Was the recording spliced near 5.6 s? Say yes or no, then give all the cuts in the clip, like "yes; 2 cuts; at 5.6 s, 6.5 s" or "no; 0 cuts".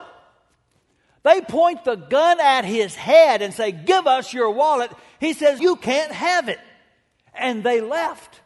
yes; 1 cut; at 5.6 s